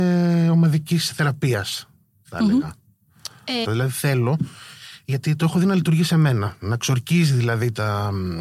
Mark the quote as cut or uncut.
cut